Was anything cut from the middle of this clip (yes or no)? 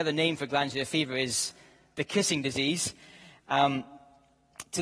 no